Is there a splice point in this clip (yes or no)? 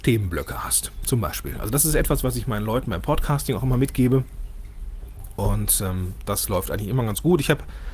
no